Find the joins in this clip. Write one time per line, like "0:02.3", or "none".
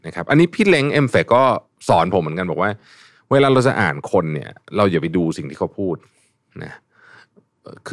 none